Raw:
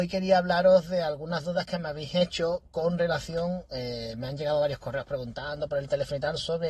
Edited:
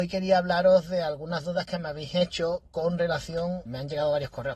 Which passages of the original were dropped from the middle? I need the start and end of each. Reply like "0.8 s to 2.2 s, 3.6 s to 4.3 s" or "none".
3.7 s to 4.1 s